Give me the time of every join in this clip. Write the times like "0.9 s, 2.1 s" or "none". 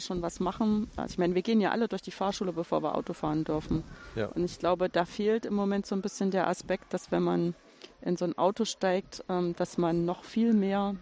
0.9 s

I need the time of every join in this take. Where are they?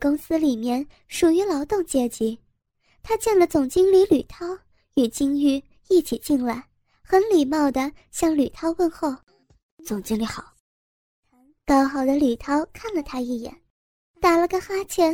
none

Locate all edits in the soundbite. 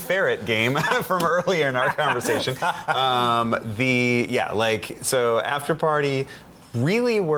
none

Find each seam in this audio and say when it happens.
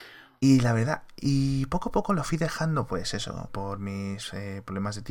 3.5 s

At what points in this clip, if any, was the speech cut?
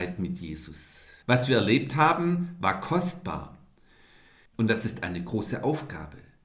1.2 s, 4.5 s

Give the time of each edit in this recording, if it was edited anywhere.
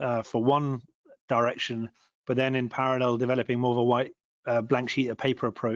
none

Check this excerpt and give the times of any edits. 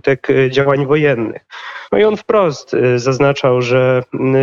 1.9 s

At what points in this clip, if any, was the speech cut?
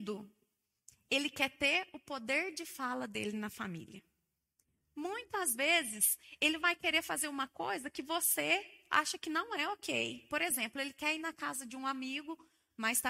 none

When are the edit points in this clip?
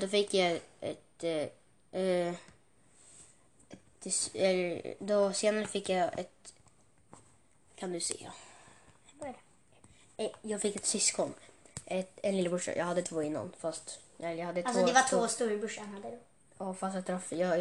none

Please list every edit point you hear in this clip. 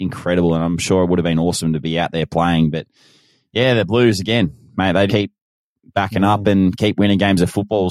5.1 s

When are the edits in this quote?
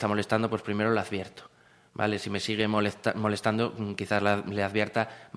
none

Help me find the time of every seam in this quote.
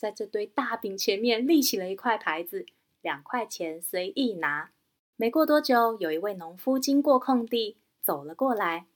2.9 s, 5.1 s, 8.0 s

